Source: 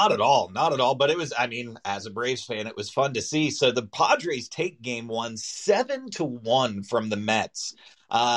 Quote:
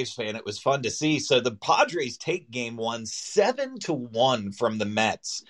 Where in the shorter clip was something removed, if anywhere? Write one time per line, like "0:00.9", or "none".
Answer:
none